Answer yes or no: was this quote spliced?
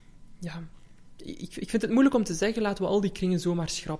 no